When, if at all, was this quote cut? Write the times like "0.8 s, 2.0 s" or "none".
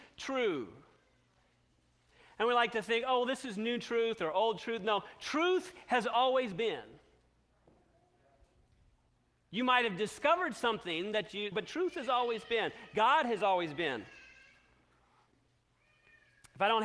11.5 s